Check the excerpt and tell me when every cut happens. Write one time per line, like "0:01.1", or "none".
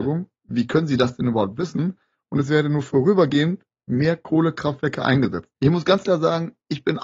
0:05.5